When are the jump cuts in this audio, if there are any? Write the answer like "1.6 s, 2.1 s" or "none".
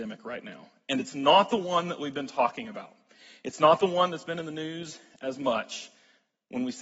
none